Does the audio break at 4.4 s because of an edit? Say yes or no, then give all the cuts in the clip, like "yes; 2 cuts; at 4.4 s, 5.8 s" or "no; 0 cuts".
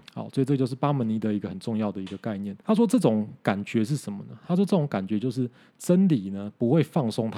no; 1 cut; at 2.6 s